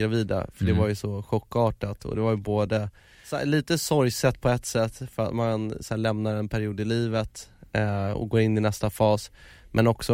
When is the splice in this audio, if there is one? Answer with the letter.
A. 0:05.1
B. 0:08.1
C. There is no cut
C